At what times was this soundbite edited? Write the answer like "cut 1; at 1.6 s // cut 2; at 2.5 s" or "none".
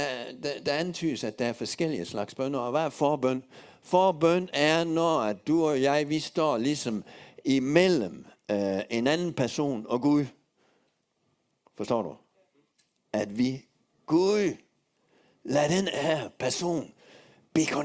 none